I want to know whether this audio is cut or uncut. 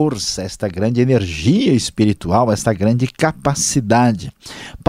uncut